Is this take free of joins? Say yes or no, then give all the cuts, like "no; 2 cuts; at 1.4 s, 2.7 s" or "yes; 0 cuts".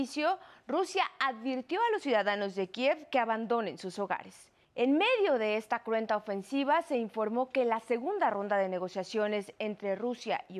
no; 1 cut; at 4.6 s